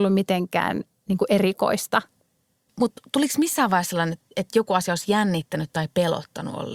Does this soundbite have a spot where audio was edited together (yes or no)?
yes